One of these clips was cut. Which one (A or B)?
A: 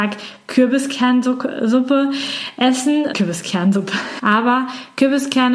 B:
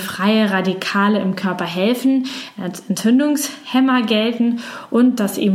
A